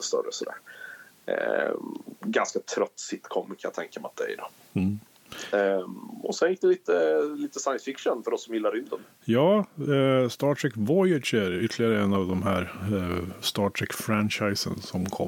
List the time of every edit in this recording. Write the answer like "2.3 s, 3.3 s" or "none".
none